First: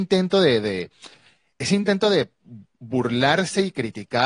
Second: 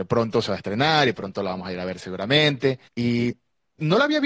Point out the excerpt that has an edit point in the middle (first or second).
second